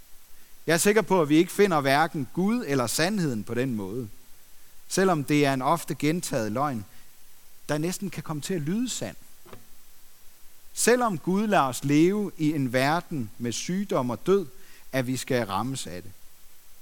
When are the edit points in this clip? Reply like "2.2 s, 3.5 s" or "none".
10.7 s, 14.8 s